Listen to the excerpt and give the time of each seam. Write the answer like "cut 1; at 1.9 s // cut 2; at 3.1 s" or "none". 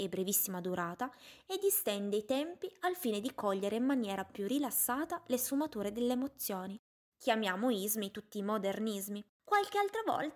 cut 1; at 7.1 s